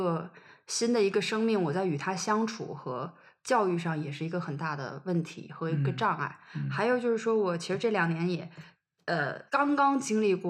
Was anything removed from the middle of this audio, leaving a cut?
yes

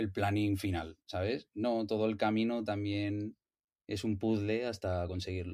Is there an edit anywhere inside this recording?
no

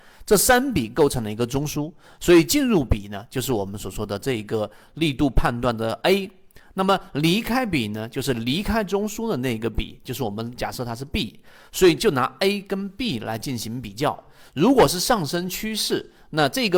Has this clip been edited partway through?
no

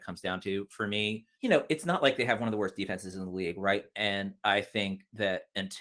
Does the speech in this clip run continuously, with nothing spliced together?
no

